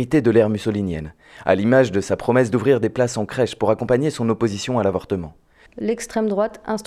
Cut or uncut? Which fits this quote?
cut